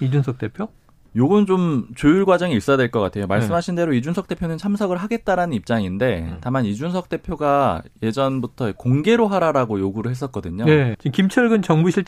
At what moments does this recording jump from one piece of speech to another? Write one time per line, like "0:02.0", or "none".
0:10.9